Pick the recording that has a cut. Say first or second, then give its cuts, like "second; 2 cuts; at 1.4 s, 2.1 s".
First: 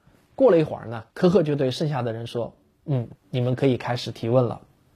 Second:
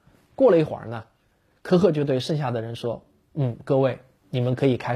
first; 2 cuts; at 1.1 s, 3.2 s